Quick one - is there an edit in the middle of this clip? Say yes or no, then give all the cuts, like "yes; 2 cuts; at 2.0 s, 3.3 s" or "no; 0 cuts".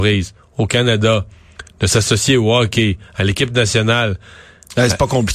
no; 0 cuts